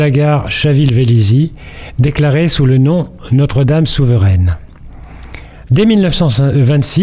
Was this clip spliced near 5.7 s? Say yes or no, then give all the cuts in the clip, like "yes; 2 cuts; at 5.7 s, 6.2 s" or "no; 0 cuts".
yes; 1 cut; at 5.7 s